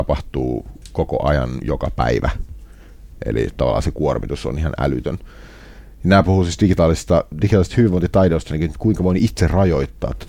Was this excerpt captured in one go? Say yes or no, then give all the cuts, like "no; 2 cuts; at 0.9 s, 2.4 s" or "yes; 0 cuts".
yes; 0 cuts